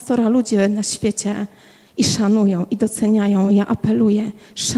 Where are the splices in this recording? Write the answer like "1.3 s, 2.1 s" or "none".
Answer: none